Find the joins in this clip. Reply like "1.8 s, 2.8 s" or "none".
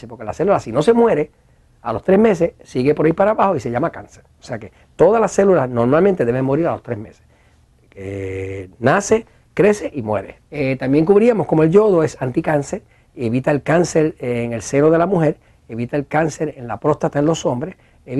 10.4 s